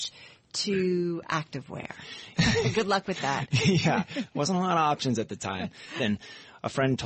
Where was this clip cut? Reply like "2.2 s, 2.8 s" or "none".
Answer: 2.3 s, 6.0 s